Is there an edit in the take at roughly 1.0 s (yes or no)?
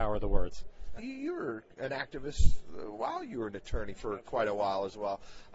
yes